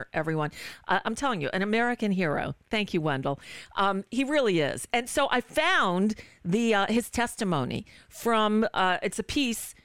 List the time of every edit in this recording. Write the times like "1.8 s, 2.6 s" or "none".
none